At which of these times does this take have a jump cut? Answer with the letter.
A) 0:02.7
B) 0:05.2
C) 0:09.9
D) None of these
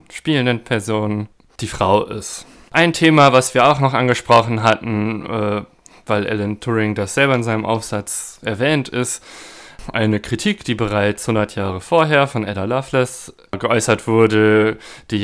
A